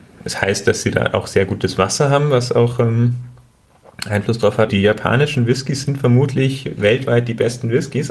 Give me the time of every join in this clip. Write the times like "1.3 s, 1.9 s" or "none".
4.7 s